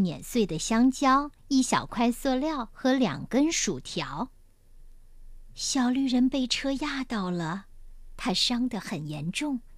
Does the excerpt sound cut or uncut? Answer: cut